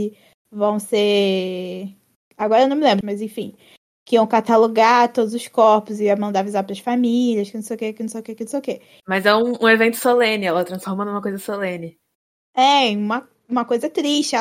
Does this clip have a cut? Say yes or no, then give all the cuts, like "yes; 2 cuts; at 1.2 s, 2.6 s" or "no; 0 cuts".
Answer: yes; 2 cuts; at 3.0 s, 9.0 s